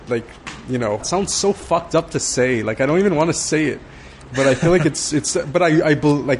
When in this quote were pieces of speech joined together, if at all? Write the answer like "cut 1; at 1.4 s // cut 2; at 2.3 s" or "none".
cut 1; at 1.0 s